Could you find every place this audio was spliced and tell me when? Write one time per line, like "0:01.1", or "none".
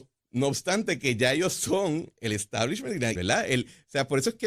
0:03.1